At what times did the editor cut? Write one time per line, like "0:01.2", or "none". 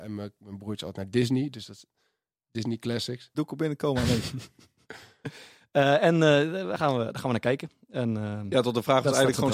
0:03.3